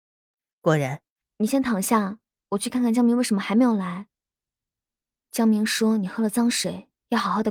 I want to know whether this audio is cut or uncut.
cut